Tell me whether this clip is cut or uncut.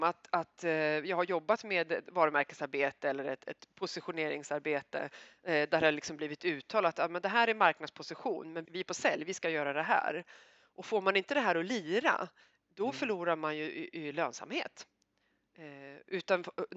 cut